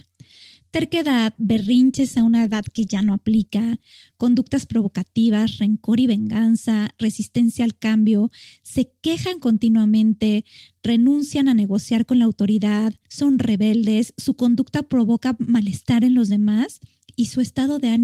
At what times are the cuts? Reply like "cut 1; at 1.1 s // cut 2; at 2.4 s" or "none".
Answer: cut 1; at 1.4 s // cut 2; at 13.0 s